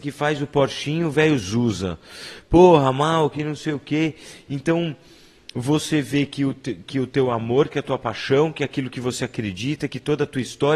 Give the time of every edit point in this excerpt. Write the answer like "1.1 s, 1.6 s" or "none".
none